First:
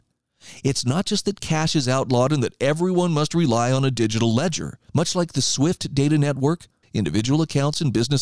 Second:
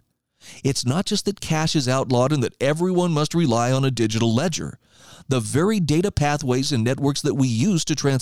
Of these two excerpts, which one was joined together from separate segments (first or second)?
first